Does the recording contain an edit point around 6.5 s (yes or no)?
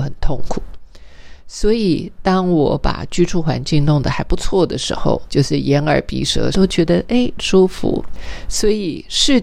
yes